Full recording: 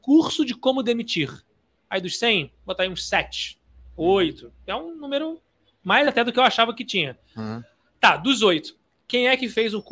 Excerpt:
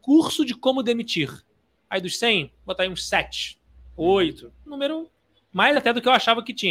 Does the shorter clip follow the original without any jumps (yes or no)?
no